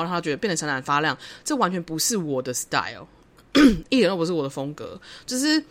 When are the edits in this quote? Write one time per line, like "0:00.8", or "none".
none